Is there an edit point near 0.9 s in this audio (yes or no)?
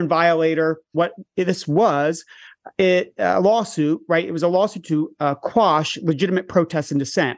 yes